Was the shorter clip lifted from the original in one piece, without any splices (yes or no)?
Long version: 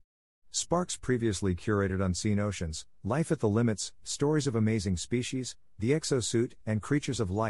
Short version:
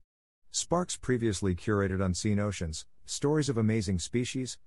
no